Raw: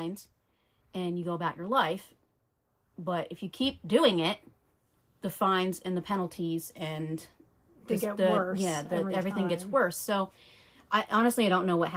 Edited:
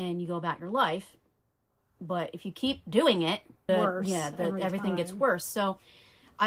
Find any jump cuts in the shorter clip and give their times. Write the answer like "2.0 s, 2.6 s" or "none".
3.7 s